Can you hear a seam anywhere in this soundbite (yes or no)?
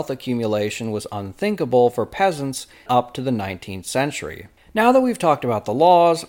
yes